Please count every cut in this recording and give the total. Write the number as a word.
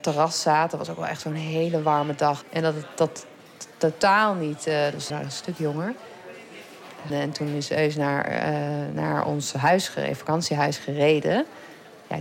three